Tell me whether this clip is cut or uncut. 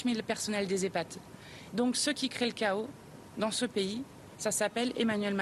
cut